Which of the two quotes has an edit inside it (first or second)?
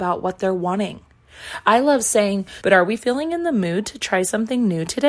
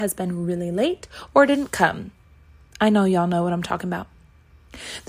first